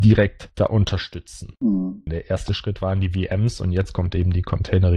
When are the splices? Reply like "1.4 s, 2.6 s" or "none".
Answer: 2.1 s